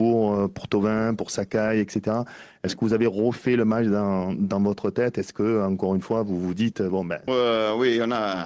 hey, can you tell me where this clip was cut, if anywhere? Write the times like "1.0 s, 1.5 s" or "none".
7.3 s